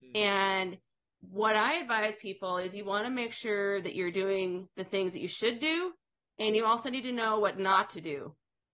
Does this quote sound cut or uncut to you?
uncut